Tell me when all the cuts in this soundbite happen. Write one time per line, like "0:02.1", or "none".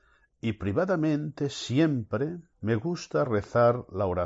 0:02.5